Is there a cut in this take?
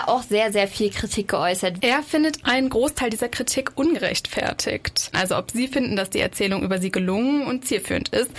yes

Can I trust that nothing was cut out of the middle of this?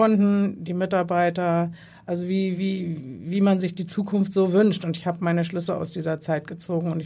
yes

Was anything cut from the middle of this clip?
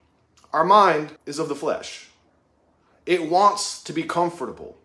yes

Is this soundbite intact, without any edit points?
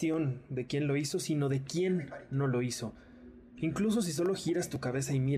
no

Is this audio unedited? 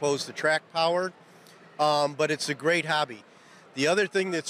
yes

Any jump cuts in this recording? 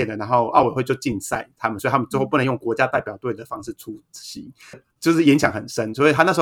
yes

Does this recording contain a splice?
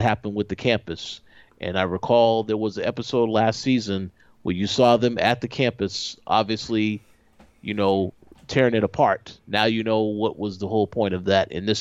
no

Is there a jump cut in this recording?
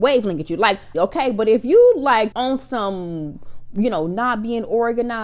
yes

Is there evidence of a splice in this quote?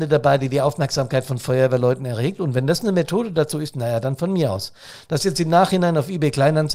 no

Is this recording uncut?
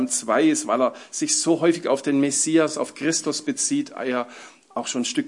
yes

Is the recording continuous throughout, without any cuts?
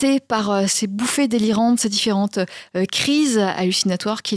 yes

